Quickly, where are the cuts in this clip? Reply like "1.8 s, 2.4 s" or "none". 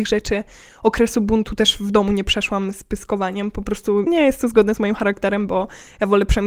4.1 s